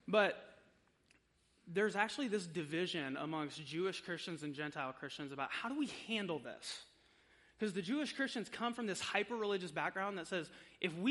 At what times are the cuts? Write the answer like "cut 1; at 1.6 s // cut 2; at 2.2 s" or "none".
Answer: none